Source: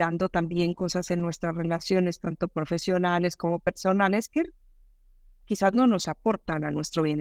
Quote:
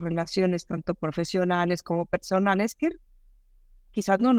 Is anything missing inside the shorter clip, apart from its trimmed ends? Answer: no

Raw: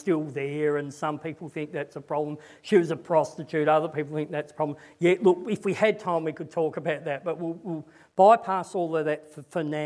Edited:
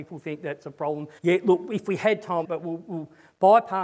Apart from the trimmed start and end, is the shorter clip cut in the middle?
yes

